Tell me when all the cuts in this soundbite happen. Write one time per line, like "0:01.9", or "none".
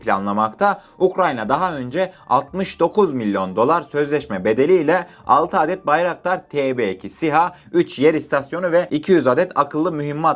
none